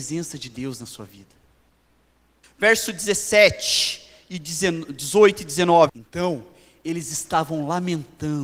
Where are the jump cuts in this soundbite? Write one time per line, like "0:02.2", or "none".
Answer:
0:02.4
0:05.9